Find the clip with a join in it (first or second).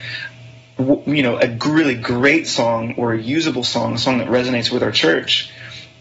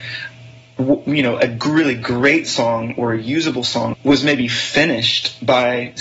second